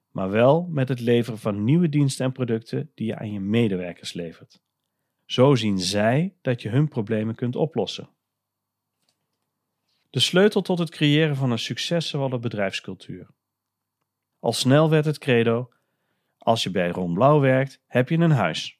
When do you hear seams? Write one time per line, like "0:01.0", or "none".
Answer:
0:14.3